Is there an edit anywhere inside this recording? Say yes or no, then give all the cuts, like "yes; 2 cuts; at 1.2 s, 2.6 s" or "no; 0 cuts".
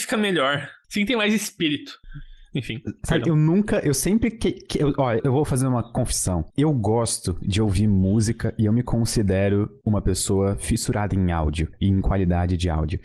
yes; 1 cut; at 5.2 s